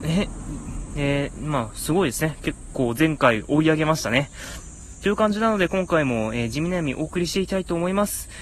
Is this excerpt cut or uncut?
uncut